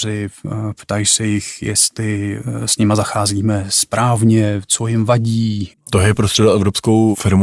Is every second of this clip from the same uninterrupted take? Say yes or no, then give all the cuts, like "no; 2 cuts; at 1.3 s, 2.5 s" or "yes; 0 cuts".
no; 1 cut; at 5.7 s